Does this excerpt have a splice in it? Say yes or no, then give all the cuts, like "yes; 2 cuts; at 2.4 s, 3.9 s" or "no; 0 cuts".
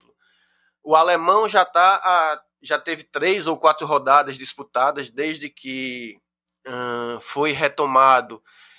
no; 0 cuts